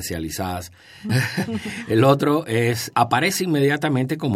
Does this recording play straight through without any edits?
no; 2 cuts; at 1.1 s, 2.9 s

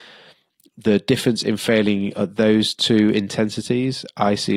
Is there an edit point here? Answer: no; 0 cuts

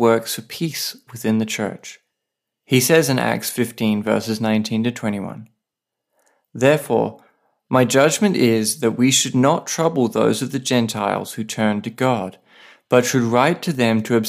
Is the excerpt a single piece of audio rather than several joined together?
yes; 0 cuts

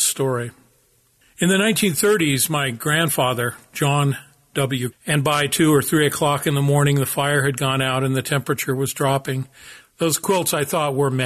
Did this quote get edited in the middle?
yes; 2 cuts; at 4.9 s, 9.8 s

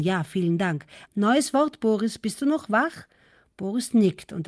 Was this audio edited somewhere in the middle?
yes; 1 cut; at 1.1 s

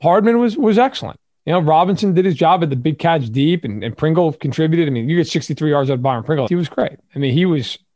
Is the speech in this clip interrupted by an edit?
yes; 1 cut; at 6.5 s

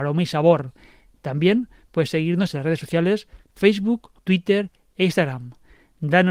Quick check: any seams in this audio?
yes; 2 cuts; at 1.1 s, 4.2 s

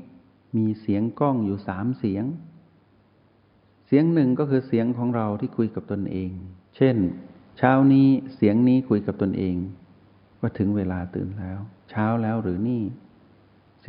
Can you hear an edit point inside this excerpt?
yes; 1 cut; at 6.6 s

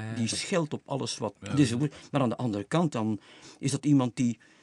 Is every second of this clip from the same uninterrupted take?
no; 2 cuts; at 1.3 s, 2.9 s

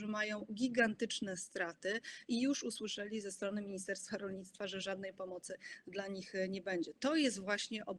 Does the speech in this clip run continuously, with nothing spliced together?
yes; 0 cuts

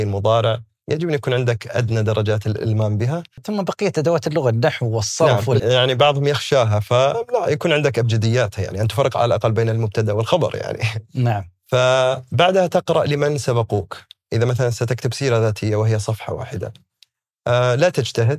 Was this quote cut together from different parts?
yes; 1 cut; at 5.6 s

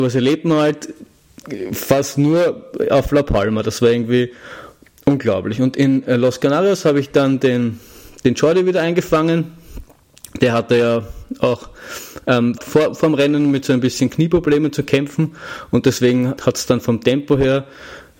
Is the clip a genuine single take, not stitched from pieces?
no; 2 cuts; at 12.6 s, 16.4 s

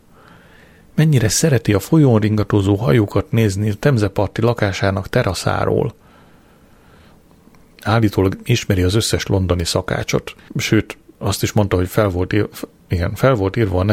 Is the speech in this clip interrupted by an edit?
yes; 1 cut; at 10.5 s

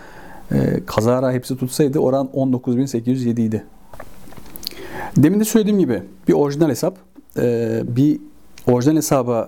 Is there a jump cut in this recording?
yes; 1 cut; at 7.9 s

